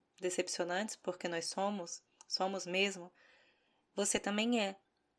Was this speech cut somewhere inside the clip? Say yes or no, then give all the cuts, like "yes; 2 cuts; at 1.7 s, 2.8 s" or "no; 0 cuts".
no; 0 cuts